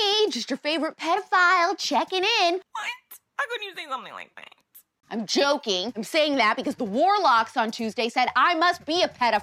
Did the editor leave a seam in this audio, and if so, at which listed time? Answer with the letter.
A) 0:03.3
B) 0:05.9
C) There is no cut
A